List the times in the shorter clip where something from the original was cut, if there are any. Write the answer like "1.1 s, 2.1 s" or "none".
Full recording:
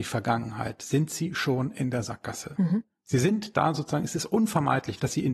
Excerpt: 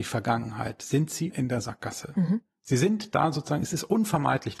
1.3 s